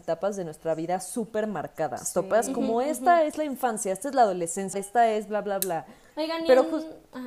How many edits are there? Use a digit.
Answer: 2